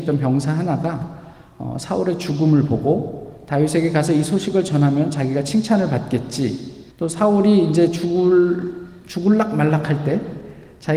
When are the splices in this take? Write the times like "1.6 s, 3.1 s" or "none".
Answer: 6.9 s